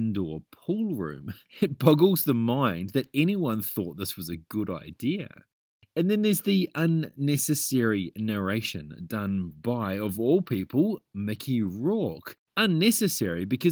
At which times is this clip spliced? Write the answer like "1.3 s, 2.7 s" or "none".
none

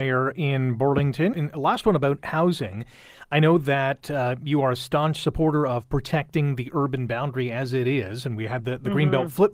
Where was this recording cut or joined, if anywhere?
1.3 s

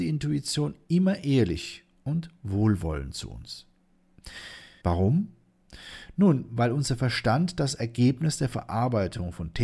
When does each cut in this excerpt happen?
4.8 s

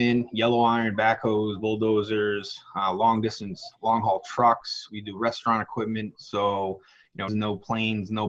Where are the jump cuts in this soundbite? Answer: 6.1 s, 7.3 s

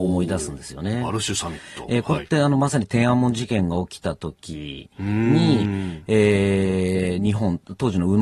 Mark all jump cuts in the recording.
none

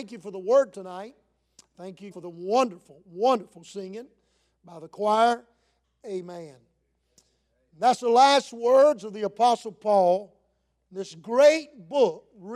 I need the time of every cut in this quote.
2.1 s, 5.8 s

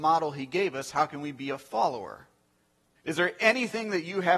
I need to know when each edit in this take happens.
3.0 s

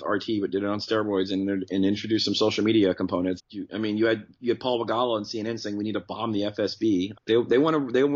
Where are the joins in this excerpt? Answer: 3.4 s, 7.1 s

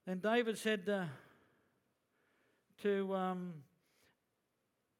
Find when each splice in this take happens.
none

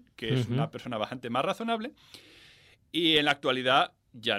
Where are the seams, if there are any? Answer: none

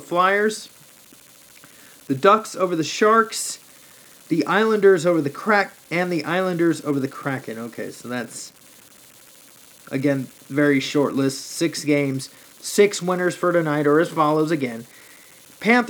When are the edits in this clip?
none

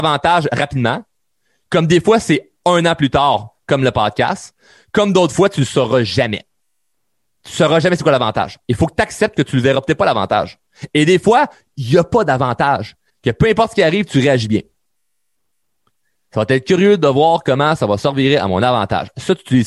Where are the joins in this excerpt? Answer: 13.1 s

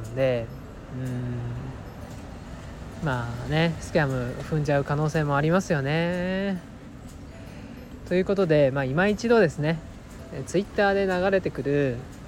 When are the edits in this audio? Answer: none

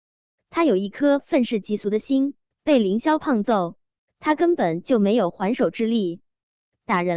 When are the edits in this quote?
2.5 s

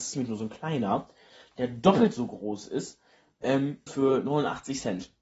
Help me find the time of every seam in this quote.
3.9 s

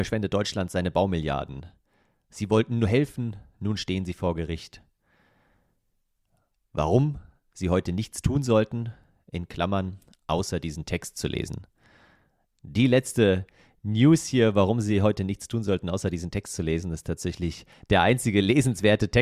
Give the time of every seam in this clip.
none

